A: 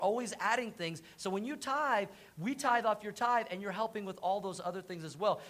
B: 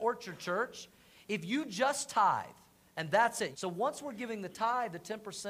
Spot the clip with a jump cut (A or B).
B